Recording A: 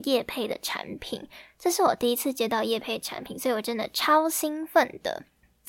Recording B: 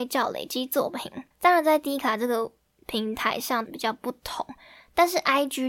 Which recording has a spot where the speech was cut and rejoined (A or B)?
B